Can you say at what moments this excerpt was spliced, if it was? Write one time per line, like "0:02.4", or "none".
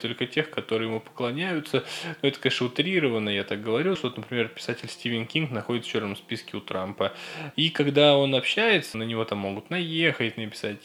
0:03.9
0:07.5
0:08.9